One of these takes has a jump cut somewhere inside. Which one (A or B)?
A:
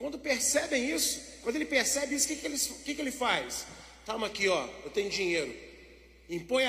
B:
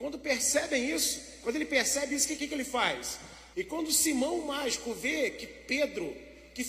B